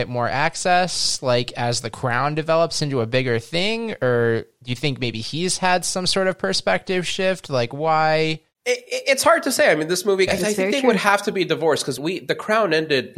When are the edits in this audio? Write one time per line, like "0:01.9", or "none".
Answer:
0:10.3
0:12.0

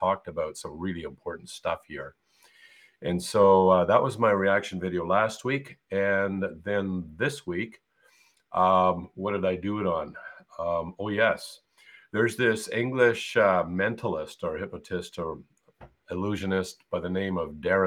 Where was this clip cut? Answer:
none

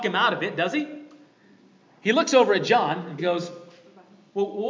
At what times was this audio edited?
0:03.2

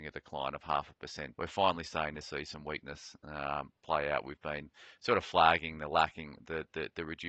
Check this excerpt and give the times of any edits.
0:01.3

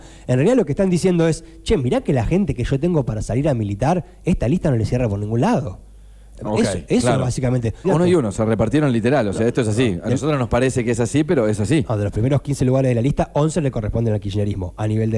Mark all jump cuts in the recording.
0:07.8

